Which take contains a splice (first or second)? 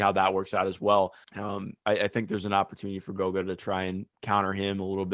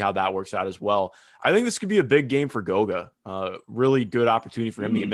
first